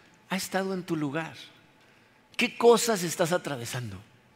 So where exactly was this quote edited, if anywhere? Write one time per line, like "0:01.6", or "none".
none